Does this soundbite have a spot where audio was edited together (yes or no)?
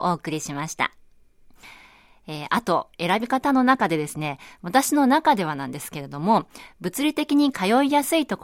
no